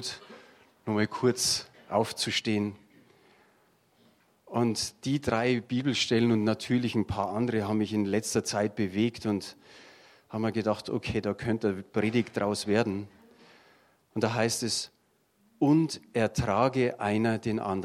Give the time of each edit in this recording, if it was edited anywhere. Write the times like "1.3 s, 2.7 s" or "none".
none